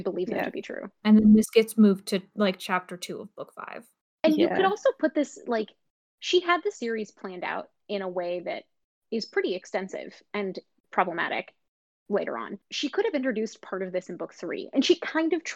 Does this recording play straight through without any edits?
no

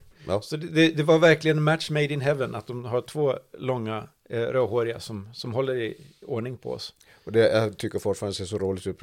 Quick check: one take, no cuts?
no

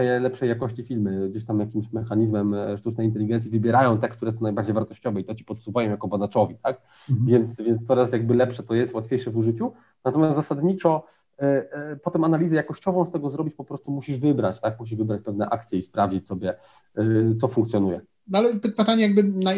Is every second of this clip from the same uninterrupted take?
yes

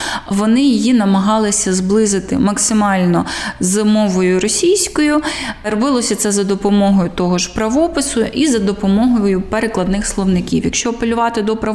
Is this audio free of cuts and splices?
yes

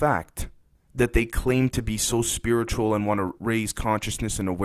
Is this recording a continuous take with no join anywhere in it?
no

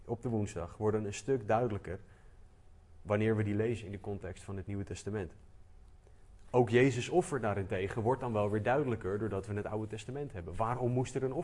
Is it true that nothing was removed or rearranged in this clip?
yes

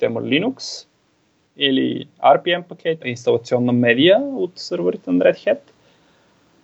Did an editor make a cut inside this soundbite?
yes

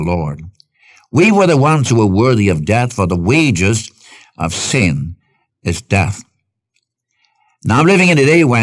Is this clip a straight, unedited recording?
yes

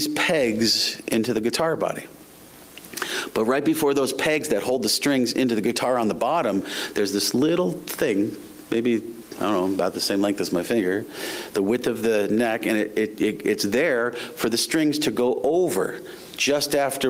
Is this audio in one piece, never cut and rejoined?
yes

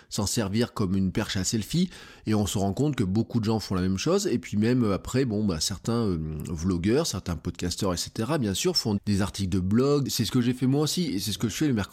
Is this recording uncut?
no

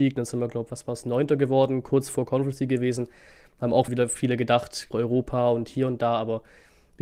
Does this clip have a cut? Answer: yes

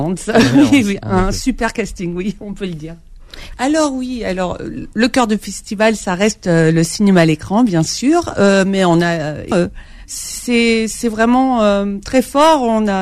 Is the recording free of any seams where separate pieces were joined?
no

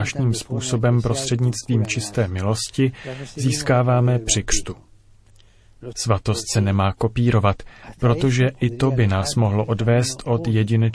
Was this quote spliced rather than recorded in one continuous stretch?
yes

